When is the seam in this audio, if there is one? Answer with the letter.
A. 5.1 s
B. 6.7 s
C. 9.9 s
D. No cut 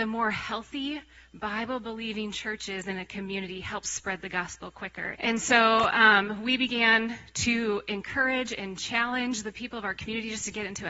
A